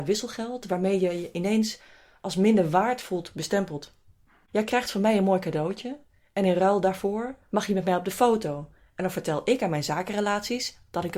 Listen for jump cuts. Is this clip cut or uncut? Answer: uncut